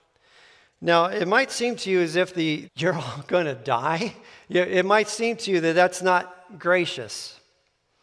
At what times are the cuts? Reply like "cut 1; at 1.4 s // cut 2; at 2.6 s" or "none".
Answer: cut 1; at 2.6 s